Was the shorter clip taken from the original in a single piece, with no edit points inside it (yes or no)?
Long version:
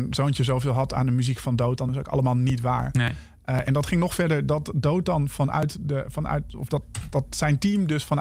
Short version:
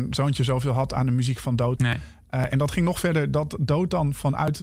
no